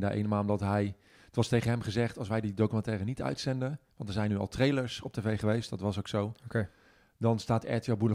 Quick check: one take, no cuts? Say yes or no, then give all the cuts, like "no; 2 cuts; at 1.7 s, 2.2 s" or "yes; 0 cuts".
yes; 0 cuts